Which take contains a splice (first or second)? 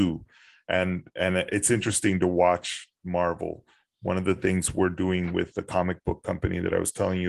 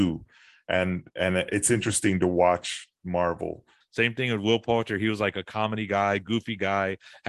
second